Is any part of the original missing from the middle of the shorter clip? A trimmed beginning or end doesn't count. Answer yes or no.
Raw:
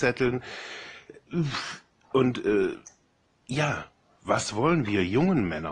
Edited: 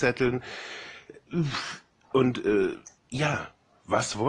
yes